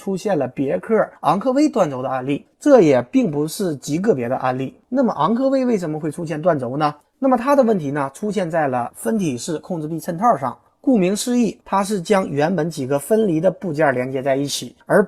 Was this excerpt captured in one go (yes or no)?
no